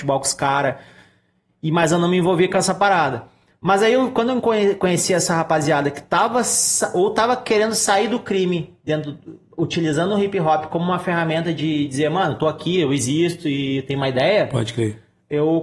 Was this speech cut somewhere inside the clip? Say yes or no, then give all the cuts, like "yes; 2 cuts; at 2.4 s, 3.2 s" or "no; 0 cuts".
no; 0 cuts